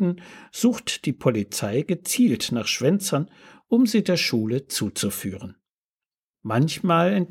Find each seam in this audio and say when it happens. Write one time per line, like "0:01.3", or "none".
0:06.3